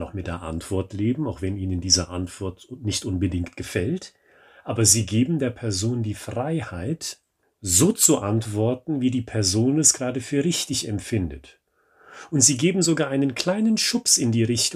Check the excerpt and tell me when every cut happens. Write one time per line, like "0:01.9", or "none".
none